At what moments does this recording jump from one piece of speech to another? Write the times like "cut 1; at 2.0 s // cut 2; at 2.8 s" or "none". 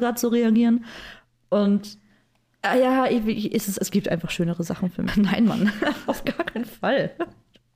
cut 1; at 3.8 s // cut 2; at 5.1 s